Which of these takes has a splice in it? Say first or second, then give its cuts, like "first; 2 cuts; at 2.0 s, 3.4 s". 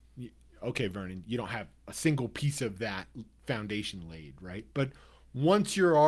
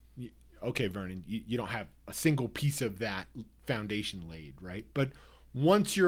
first; 1 cut; at 1.2 s